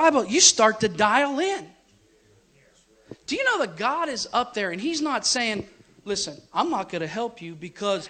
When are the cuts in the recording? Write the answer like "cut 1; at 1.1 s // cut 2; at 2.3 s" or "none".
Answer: none